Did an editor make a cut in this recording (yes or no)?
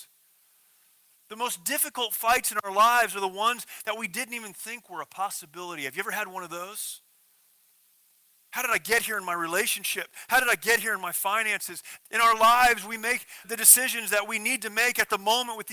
yes